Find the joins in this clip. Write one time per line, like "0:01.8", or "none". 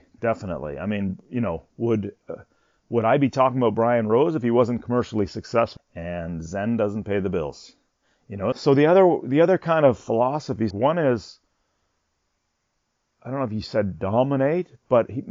0:05.8
0:08.5
0:10.7